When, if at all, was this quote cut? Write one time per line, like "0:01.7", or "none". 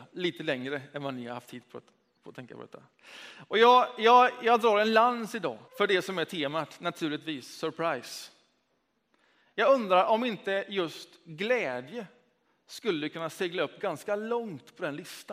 0:05.7